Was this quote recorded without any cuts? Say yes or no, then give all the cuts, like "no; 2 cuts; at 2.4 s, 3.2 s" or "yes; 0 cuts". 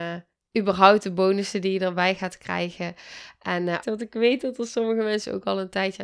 no; 1 cut; at 3.8 s